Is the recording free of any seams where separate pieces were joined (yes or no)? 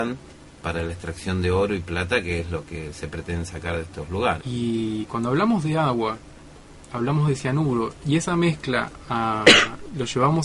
no